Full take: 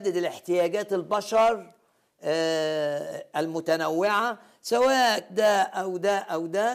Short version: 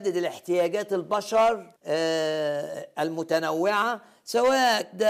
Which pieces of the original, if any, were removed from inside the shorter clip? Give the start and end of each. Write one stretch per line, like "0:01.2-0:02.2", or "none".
0:01.8-0:02.1